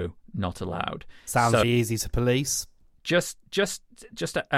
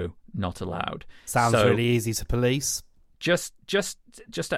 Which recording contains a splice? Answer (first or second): first